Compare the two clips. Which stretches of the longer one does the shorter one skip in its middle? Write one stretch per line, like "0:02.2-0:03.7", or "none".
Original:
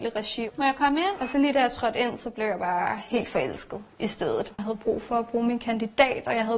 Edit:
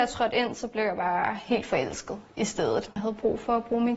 none